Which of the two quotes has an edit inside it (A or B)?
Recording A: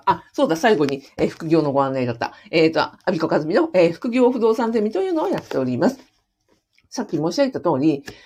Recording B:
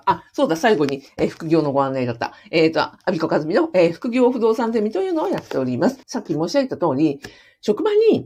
B